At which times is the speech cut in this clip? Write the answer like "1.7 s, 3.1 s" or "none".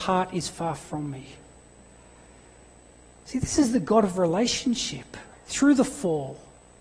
5.3 s